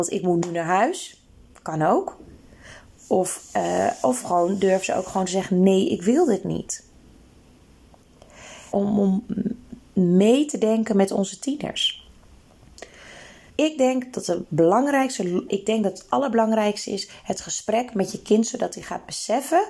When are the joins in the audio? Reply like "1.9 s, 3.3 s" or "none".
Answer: 8.7 s, 13.5 s, 15.5 s